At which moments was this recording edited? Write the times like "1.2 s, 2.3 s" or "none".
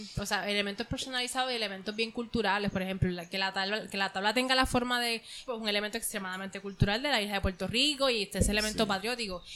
5.5 s